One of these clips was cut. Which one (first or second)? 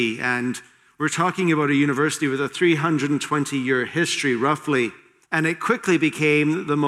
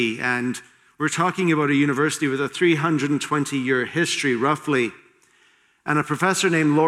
first